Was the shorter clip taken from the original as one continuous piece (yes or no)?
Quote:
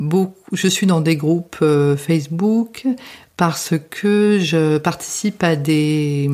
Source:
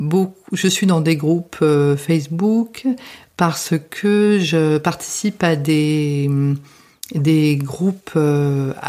yes